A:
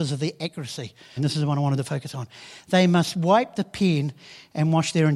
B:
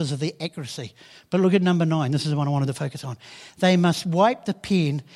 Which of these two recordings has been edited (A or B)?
A